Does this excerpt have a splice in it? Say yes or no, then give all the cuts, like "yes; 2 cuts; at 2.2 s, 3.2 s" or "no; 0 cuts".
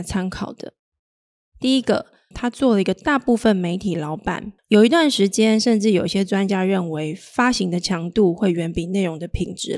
yes; 2 cuts; at 2.3 s, 4.6 s